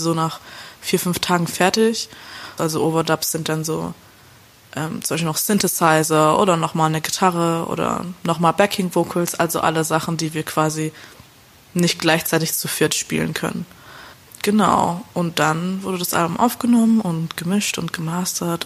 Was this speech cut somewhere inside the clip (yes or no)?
yes